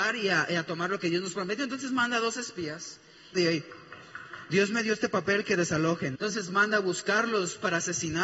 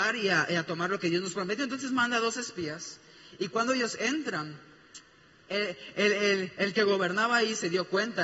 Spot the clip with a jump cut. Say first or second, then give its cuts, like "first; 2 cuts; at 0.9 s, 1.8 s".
first; 2 cuts; at 3.3 s, 6.1 s